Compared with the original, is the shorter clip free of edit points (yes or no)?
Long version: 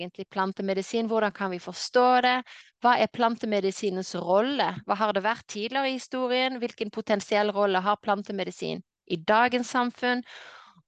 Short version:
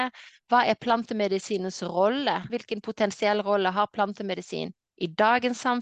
no